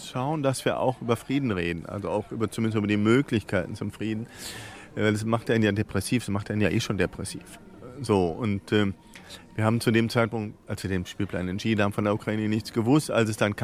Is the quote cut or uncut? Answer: uncut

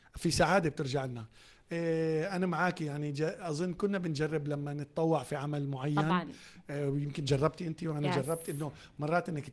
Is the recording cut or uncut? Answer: uncut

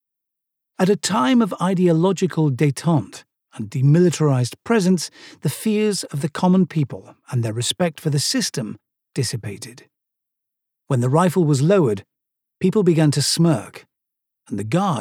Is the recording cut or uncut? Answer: uncut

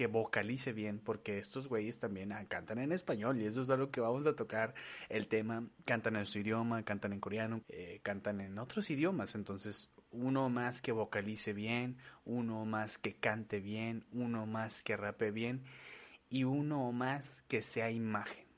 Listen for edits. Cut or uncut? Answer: cut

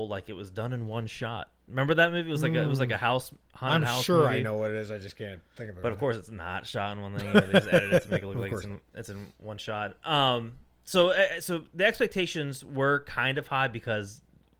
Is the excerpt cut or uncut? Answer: uncut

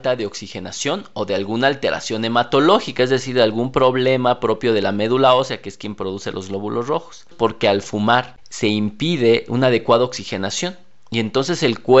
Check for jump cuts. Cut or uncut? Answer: cut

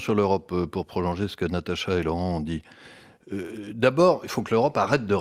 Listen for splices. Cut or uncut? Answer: uncut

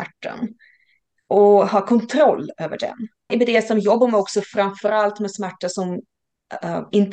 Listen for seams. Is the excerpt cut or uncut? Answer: cut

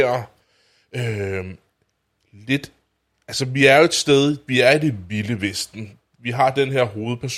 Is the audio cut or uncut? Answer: uncut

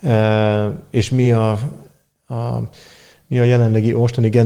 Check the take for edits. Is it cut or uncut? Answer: uncut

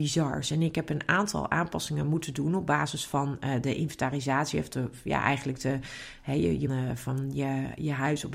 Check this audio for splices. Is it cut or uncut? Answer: cut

